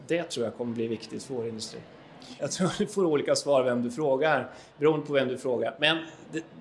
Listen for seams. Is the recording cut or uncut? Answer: cut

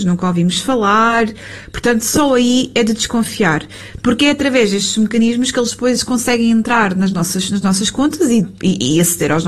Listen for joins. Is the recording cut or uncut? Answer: cut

